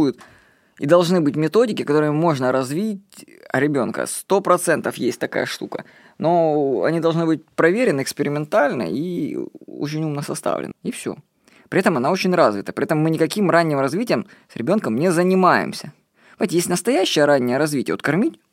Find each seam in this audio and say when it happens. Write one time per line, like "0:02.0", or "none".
0:10.7

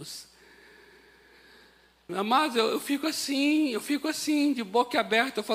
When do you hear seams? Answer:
0:02.1

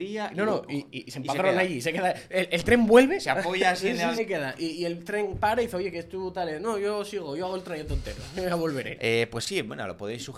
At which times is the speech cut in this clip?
0:04.2
0:08.9

